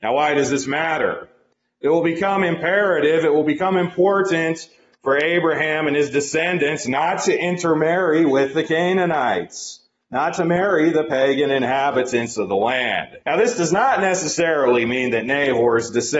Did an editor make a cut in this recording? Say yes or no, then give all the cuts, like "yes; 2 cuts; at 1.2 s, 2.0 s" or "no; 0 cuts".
yes; 1 cut; at 13.2 s